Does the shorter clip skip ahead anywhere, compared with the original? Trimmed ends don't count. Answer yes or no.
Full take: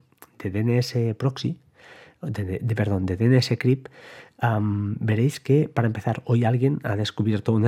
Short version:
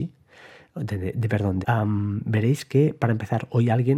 yes